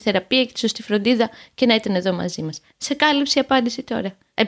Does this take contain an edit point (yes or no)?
no